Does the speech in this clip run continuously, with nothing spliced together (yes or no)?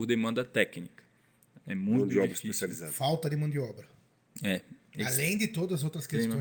yes